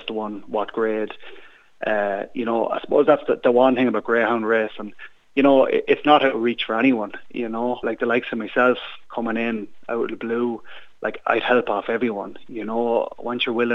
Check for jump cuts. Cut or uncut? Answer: cut